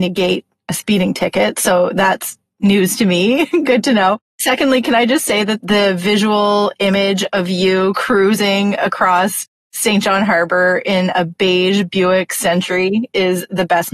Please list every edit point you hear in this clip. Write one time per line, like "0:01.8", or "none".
none